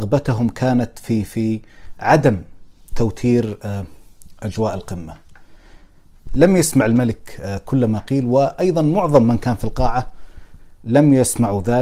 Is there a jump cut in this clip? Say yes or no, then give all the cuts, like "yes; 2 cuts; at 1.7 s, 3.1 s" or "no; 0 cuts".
yes; 1 cut; at 6.3 s